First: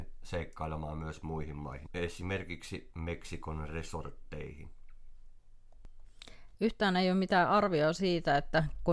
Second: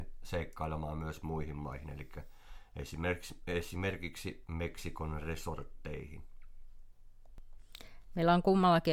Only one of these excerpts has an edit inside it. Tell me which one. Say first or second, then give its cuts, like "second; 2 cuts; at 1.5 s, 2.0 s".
first; 2 cuts; at 1.9 s, 6.5 s